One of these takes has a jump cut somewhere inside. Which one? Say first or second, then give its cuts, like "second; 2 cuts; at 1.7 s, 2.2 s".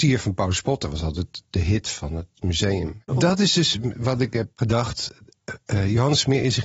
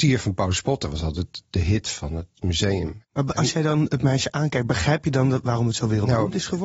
first; 1 cut; at 3.1 s